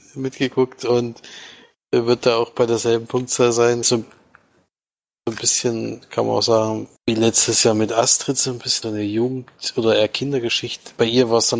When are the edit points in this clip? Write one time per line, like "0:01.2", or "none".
0:03.8
0:07.0
0:08.8